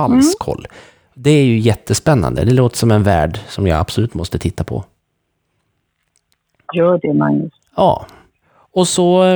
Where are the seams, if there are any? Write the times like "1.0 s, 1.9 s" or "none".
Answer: none